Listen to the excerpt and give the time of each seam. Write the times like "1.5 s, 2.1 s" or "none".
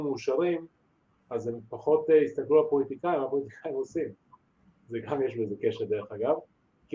none